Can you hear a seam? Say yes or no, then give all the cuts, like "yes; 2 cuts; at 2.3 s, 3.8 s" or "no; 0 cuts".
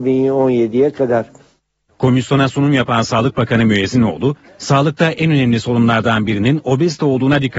yes; 1 cut; at 1.9 s